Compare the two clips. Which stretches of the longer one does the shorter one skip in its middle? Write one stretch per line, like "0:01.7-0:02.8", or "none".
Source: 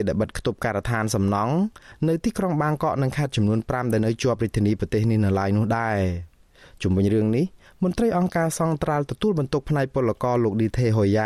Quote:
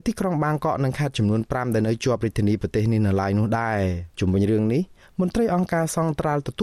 0:06.3-0:06.8